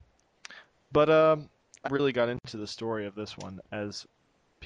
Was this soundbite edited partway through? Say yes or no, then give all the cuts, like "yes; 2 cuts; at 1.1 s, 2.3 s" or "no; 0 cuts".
yes; 2 cuts; at 1.8 s, 3.6 s